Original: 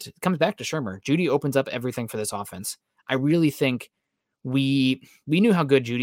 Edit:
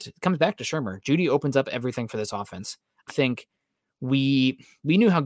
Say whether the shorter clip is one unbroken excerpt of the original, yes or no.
no